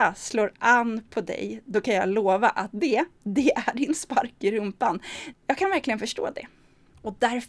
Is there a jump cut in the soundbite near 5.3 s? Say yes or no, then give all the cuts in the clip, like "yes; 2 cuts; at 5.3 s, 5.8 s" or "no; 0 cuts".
yes; 1 cut; at 5.3 s